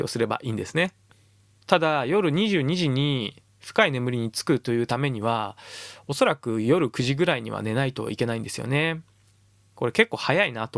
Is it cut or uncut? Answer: cut